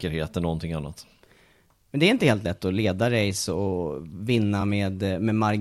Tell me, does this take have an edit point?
no; 0 cuts

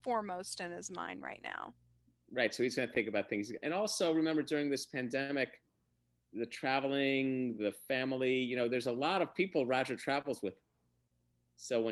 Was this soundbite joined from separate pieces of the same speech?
no; 0 cuts

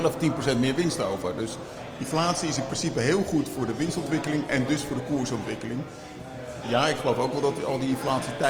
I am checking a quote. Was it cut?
yes; 1 cut; at 6.6 s

